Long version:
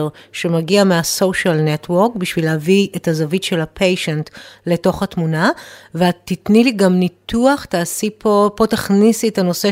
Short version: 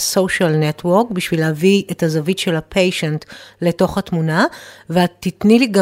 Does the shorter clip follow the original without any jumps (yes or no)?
yes